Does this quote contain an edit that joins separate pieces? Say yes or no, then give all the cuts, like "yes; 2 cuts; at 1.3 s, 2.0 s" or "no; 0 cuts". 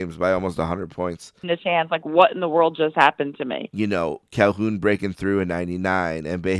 yes; 2 cuts; at 1.4 s, 3.7 s